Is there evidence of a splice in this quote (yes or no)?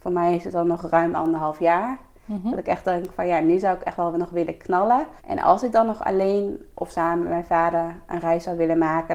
yes